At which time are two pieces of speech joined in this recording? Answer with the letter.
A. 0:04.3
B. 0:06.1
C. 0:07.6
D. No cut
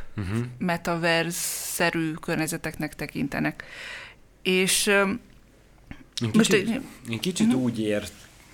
B